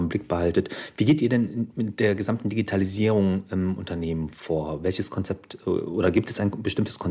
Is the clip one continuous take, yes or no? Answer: yes